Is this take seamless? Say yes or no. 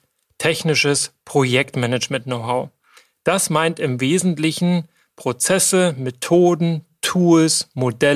yes